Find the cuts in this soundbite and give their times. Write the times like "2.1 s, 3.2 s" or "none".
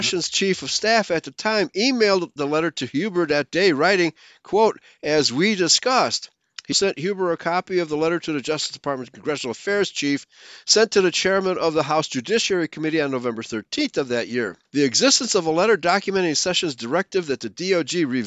6.7 s, 14.7 s